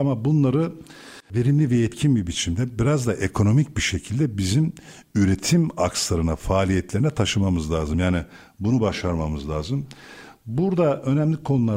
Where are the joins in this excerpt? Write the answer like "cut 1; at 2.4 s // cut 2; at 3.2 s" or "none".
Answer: none

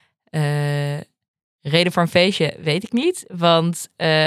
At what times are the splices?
none

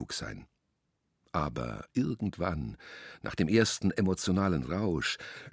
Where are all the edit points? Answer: none

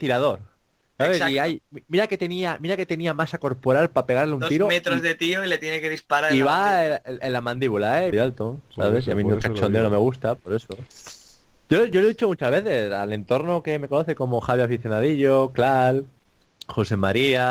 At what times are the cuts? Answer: cut 1; at 8.1 s

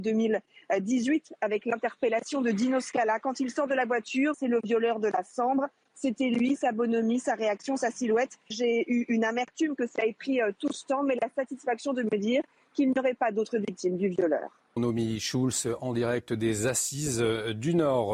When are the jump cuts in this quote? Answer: cut 1; at 4.3 s // cut 2; at 8.5 s // cut 3; at 14.8 s

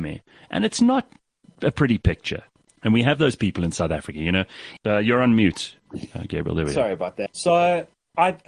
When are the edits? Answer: cut 1; at 2.6 s // cut 2; at 4.8 s // cut 3; at 7.3 s

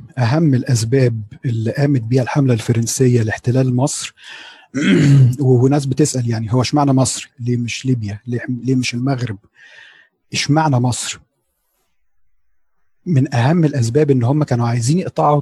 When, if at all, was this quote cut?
cut 1; at 7.3 s

